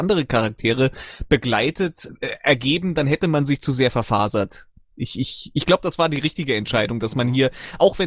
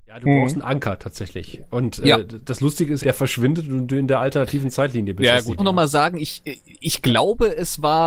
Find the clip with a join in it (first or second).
second